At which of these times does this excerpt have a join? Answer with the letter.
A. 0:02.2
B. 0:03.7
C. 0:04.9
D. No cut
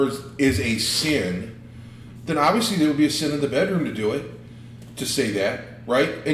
D